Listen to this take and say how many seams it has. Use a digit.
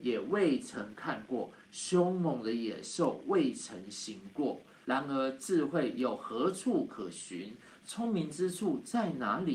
1